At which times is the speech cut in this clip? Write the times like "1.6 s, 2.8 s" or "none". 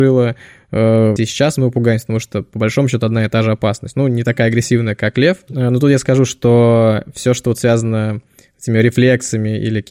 1.2 s, 5.5 s